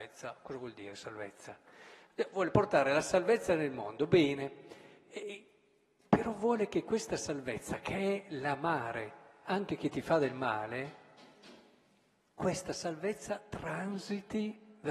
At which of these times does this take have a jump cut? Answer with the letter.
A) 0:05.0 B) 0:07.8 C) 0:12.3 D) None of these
D